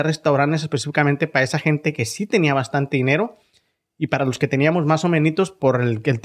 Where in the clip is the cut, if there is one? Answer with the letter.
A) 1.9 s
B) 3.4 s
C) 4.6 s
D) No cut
D